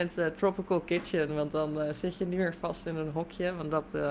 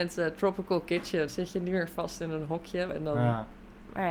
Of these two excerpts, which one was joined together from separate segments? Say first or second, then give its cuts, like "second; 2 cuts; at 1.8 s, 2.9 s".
second; 2 cuts; at 1.3 s, 2.9 s